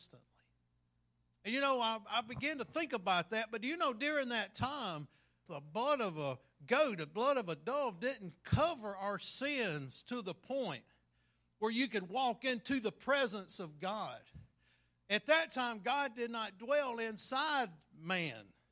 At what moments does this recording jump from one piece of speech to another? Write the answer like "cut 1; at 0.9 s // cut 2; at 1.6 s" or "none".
cut 1; at 5.5 s